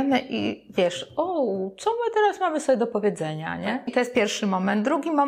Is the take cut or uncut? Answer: cut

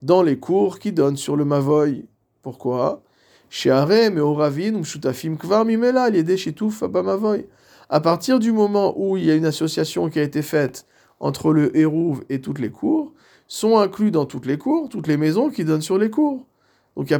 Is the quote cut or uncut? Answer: uncut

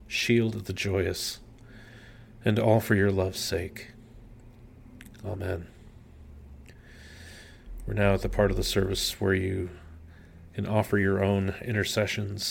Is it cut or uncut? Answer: uncut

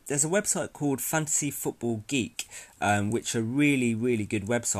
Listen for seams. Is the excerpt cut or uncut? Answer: uncut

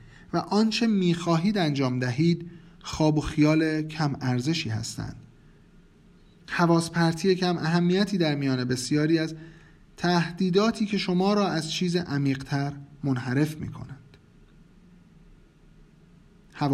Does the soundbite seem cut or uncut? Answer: uncut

